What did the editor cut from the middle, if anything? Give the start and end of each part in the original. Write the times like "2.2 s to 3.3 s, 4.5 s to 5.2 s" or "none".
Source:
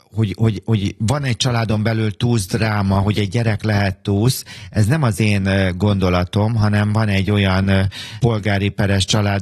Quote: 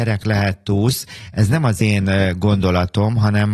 none